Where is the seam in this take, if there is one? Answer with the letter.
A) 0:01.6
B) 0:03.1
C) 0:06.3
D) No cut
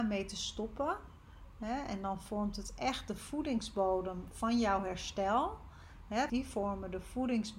C